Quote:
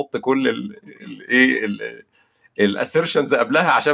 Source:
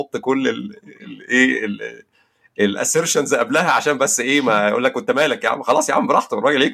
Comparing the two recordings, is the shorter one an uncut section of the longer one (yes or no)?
yes